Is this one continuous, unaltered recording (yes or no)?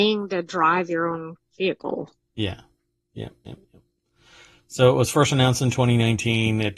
yes